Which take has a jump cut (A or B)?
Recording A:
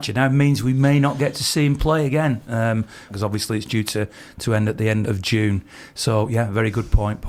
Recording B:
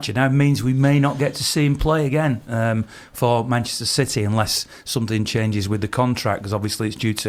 A